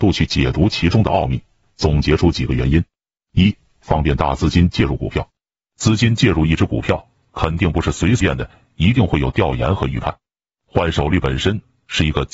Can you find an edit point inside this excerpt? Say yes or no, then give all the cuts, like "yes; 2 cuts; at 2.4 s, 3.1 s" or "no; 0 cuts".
yes; 1 cut; at 8.2 s